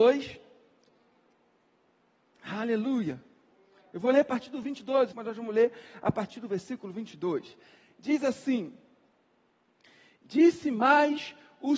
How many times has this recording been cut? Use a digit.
1